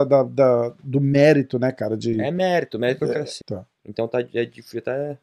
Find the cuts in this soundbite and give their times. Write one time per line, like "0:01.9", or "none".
0:03.4